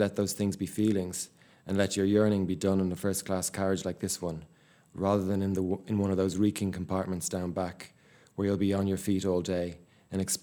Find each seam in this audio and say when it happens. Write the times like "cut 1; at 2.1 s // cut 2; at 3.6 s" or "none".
none